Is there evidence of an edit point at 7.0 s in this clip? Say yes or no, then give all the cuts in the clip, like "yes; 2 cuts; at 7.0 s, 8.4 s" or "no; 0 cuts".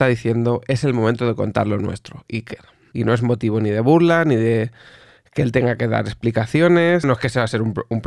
yes; 2 cuts; at 2.9 s, 7.0 s